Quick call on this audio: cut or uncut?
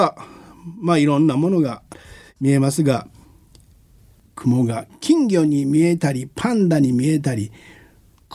uncut